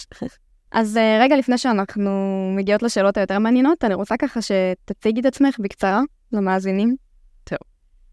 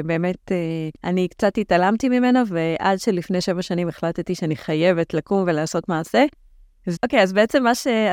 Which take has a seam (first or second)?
second